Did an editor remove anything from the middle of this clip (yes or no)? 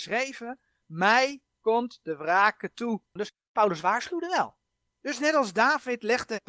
yes